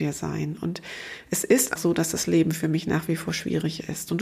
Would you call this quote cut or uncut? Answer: cut